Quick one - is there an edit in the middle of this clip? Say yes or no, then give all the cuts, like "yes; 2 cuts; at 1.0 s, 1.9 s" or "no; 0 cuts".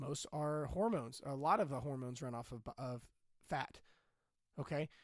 no; 0 cuts